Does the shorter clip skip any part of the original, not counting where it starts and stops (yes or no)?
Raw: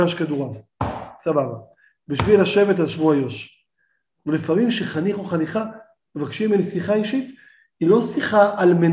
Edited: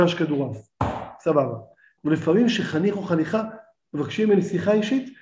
yes